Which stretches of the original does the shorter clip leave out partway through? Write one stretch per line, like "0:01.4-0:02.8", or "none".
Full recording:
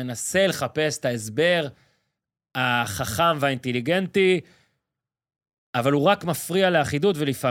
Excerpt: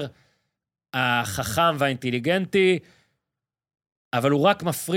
none